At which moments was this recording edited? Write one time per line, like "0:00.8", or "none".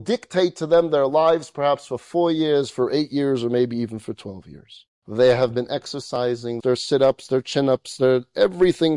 0:04.9
0:06.6